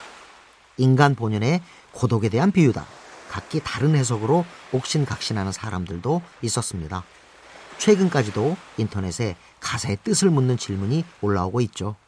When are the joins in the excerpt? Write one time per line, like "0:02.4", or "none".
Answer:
none